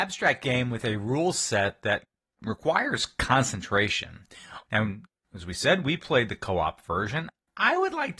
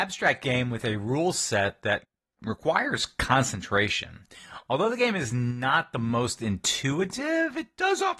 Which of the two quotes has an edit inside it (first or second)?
first